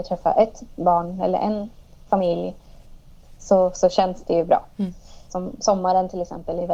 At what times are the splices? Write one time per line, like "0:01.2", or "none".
0:05.3